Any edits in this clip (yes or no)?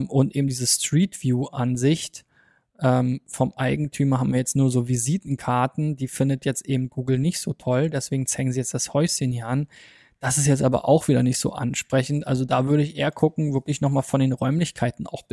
no